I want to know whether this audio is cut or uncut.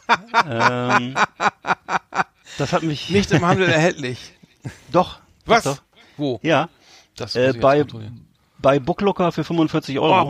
uncut